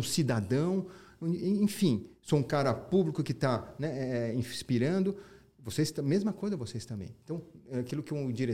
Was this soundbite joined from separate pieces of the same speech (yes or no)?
no